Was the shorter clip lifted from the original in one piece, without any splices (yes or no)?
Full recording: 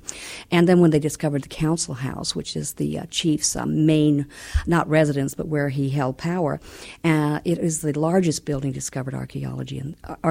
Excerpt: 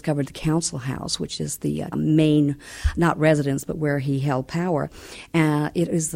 no